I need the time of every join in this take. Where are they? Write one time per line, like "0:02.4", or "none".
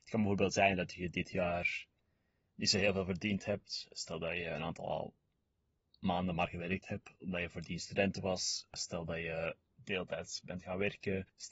none